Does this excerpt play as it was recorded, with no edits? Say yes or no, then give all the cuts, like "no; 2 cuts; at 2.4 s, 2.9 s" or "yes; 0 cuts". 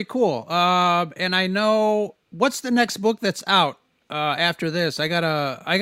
yes; 0 cuts